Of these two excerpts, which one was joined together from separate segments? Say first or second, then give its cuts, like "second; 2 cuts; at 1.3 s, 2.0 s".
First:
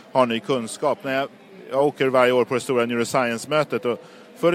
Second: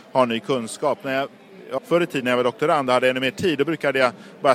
second; 1 cut; at 1.8 s